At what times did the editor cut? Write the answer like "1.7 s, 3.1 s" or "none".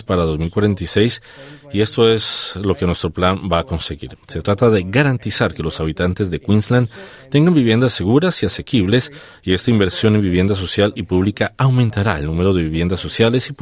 none

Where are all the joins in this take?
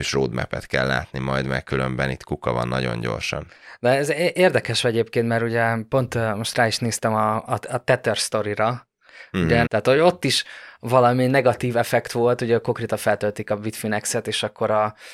9.7 s

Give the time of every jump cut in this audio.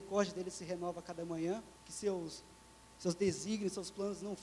1.8 s

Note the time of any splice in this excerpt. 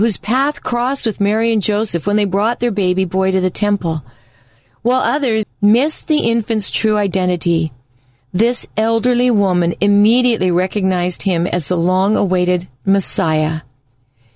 5.4 s

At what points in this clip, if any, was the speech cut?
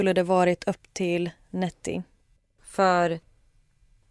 2.6 s

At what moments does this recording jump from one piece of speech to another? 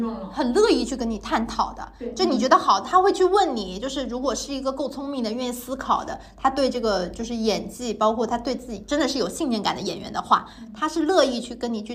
none

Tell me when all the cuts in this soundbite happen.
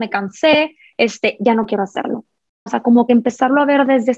2.7 s

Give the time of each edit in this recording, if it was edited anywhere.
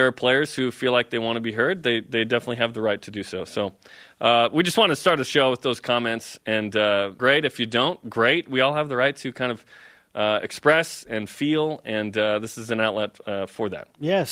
7.2 s

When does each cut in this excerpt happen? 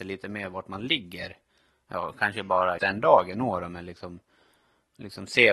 2.8 s

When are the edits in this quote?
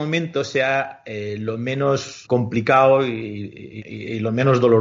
2.3 s, 3.8 s

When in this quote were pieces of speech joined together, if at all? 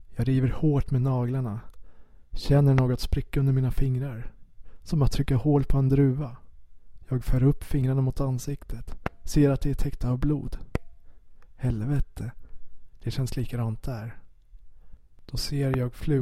13.0 s

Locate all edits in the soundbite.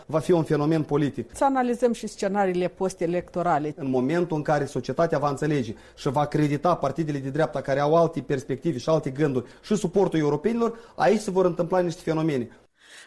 3.7 s

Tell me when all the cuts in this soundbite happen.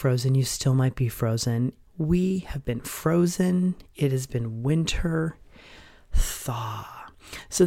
1.8 s

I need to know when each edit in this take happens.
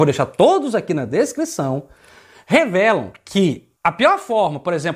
3.8 s

